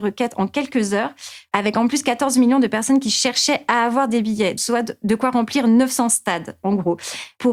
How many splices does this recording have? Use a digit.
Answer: 1